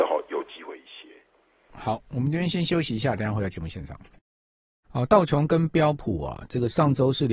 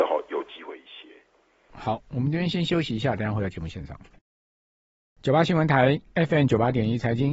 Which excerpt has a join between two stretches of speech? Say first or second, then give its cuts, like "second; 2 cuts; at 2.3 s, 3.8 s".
first; 1 cut; at 4.8 s